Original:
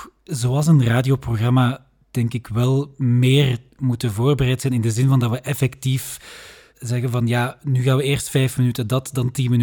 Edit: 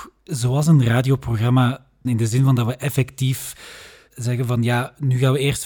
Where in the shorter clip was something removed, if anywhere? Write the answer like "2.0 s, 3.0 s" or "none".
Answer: 2.1 s